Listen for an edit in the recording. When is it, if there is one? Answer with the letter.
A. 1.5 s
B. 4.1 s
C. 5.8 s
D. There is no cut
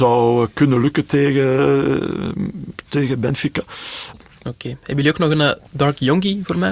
B